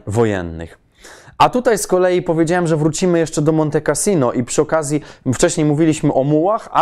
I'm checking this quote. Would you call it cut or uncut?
uncut